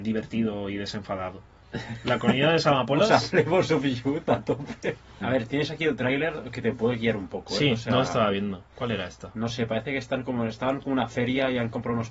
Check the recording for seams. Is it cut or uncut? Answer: cut